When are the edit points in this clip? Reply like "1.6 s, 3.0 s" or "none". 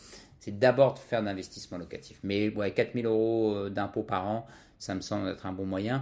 none